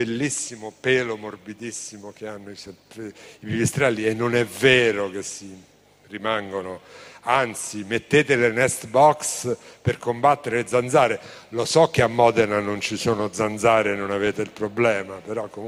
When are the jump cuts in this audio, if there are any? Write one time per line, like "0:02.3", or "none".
none